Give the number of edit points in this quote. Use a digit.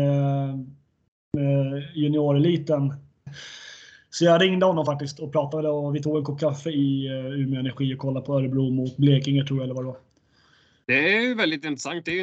2